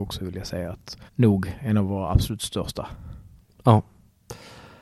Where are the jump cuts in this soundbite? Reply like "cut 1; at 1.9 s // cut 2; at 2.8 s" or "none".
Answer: cut 1; at 1.1 s

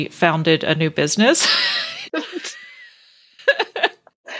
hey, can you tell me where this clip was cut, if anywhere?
cut 1; at 2.1 s

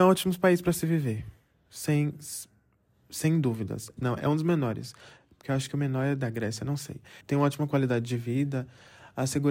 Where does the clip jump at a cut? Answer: cut 1; at 4.0 s // cut 2; at 7.2 s

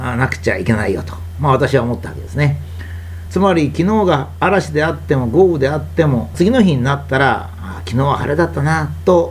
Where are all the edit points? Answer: cut 1; at 3.3 s // cut 2; at 6.3 s

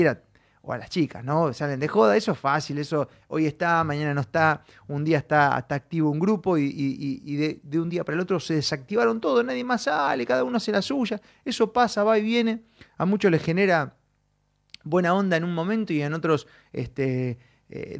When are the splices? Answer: none

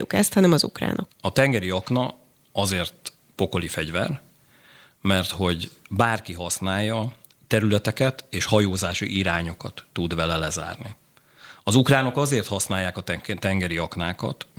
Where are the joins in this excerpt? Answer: cut 1; at 1.1 s

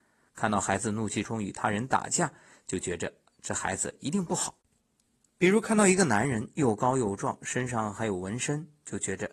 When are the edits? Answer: cut 1; at 1.2 s // cut 2; at 5.2 s

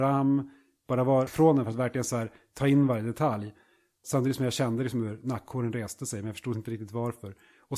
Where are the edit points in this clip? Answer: cut 1; at 1.3 s

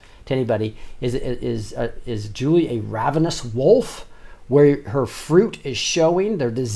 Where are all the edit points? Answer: cut 1; at 2.0 s

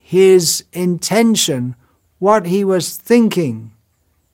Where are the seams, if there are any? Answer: cut 1; at 2.0 s

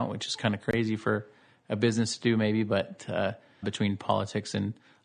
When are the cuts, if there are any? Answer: cut 1; at 3.6 s

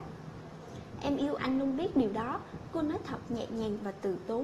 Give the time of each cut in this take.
cut 1; at 1.4 s

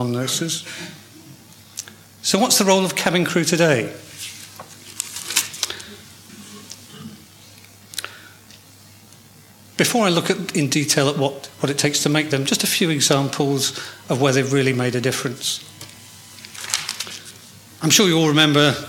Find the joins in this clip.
cut 1; at 6.3 s

